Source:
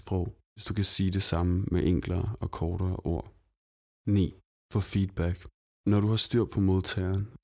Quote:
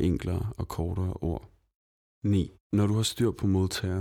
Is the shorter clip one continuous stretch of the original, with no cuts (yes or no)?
no